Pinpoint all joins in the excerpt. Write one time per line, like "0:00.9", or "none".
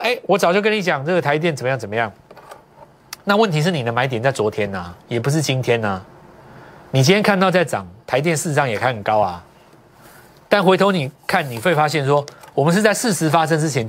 none